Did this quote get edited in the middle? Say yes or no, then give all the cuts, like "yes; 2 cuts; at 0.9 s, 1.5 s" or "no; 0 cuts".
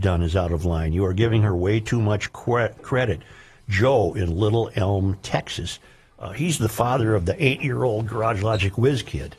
no; 0 cuts